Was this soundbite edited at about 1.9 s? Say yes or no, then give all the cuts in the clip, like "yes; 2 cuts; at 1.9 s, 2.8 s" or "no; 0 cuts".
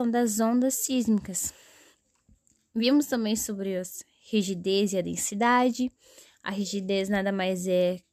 no; 0 cuts